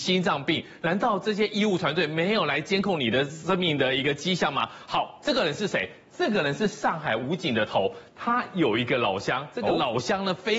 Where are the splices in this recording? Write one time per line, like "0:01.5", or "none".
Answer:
none